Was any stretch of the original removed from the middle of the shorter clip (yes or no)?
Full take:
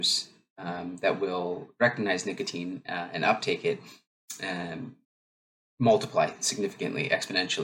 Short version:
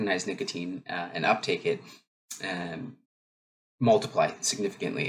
no